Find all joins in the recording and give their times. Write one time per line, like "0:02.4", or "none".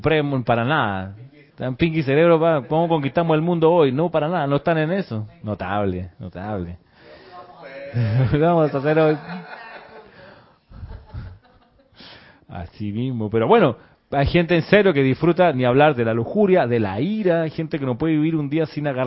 0:01.5
0:05.4